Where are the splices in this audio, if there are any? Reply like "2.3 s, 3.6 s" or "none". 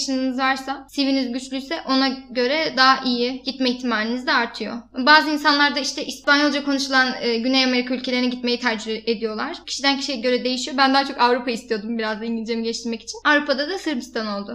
3.4 s, 9.6 s